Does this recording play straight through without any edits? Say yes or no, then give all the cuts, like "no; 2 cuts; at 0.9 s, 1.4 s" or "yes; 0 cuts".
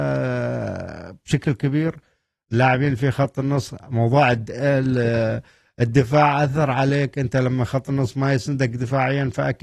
yes; 0 cuts